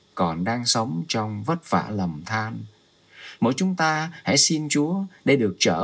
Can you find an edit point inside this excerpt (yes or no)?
no